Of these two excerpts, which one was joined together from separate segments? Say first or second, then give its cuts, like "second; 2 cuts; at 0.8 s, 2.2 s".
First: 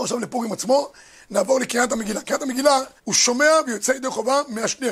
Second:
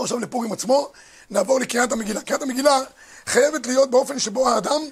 first; 1 cut; at 3.0 s